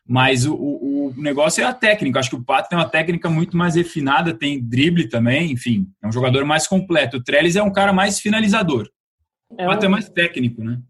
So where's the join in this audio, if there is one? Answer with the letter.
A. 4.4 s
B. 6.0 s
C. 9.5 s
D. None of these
C